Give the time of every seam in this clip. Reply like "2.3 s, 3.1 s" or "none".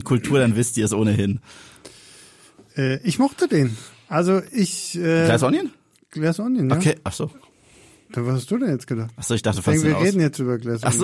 none